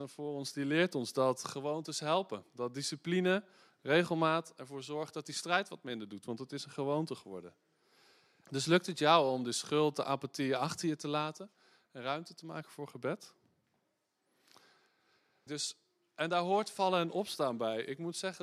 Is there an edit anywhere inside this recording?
yes; 2 cuts; at 8.4 s, 15.5 s

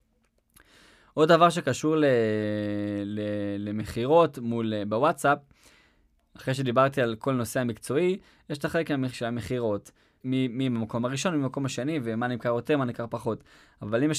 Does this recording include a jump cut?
yes; 1 cut; at 10.2 s

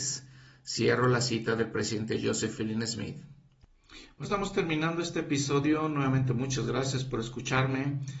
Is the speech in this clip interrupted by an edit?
yes; 1 cut; at 4.2 s

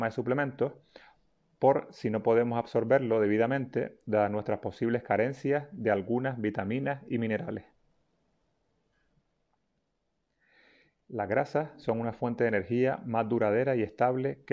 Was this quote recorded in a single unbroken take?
yes; 0 cuts

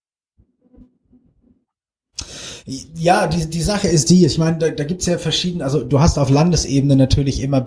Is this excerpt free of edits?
yes; 0 cuts

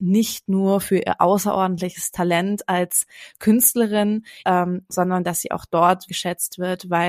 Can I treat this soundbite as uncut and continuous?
no; 2 cuts; at 4.4 s, 6.1 s

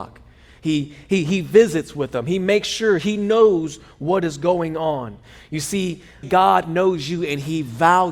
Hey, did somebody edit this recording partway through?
yes; 1 cut; at 6.2 s

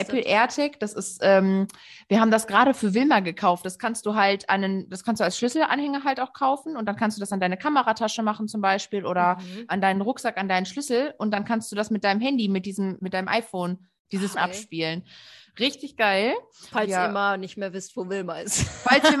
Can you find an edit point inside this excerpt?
yes; 3 cuts; at 13.0 s, 14.3 s, 16.7 s

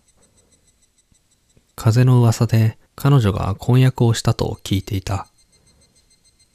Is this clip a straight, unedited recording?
no; 1 cut; at 2.9 s

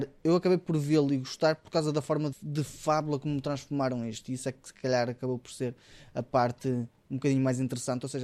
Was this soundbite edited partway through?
yes; 1 cut; at 2.3 s

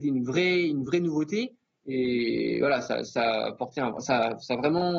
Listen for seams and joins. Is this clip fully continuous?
yes; 0 cuts

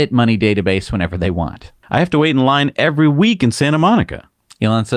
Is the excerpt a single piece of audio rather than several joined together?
no; 1 cut; at 1.8 s

